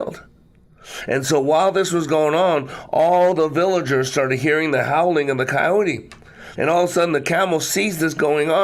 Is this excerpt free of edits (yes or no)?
no